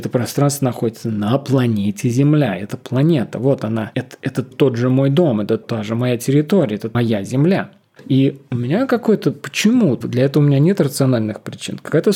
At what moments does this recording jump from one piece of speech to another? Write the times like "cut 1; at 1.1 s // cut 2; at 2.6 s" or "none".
cut 1; at 8.0 s // cut 2; at 10.0 s